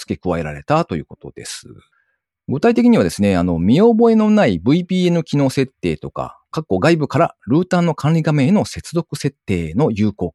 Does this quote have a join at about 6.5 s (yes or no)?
yes